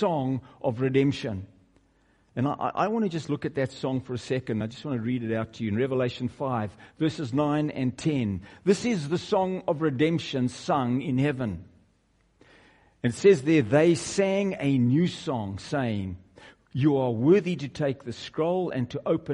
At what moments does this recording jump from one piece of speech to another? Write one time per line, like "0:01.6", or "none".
none

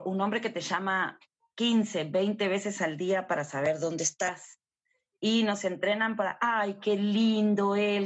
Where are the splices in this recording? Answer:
none

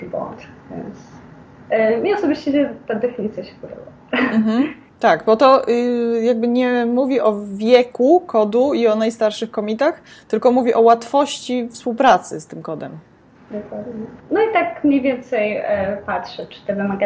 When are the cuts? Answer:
0:14.2

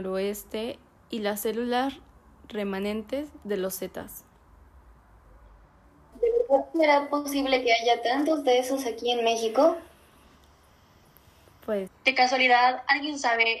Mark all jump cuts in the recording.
0:06.1
0:11.9

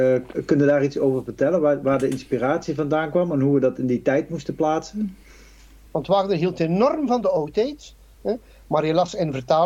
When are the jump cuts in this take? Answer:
0:05.9
0:08.1

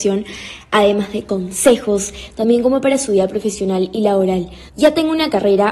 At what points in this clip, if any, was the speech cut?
0:02.3
0:04.7

